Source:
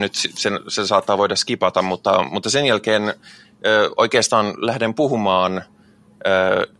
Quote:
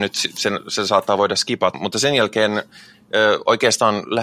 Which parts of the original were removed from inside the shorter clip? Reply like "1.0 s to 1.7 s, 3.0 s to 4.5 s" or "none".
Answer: 1.7 s to 2.3 s